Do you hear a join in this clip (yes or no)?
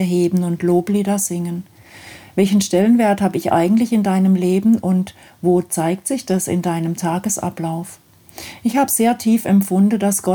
no